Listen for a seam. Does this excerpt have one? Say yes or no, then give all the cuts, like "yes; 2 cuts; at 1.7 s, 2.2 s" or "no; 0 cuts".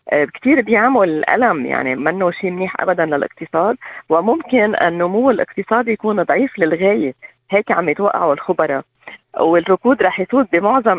yes; 1 cut; at 2.0 s